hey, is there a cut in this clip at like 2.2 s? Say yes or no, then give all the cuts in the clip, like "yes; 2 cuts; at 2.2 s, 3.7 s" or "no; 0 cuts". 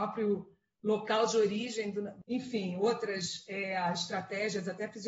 yes; 1 cut; at 2.2 s